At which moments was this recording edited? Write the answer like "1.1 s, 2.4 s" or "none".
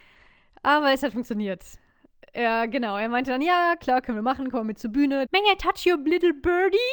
5.2 s